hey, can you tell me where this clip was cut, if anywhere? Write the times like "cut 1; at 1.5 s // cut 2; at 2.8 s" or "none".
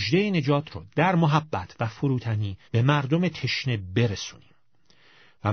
cut 1; at 2.7 s